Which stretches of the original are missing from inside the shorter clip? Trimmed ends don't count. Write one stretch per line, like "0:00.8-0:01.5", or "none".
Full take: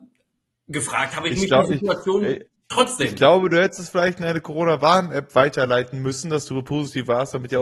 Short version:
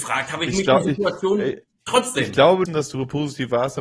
0:03.5-0:06.2